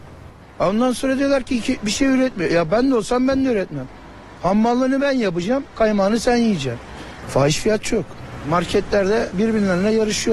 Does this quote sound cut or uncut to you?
cut